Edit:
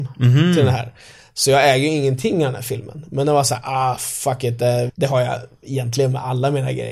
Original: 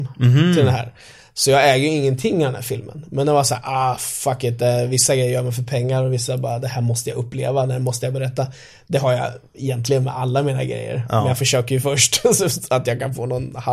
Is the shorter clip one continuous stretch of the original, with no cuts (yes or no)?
no